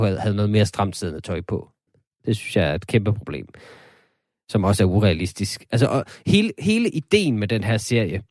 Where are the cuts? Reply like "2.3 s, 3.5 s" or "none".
1.9 s